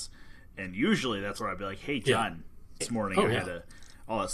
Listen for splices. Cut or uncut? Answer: cut